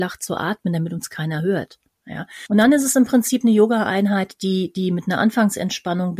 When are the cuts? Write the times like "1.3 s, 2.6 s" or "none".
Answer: 2.5 s